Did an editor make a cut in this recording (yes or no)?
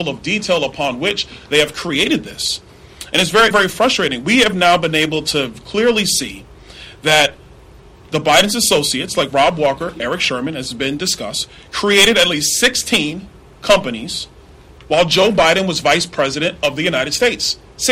yes